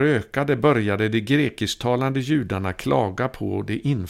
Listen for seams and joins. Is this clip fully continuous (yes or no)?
yes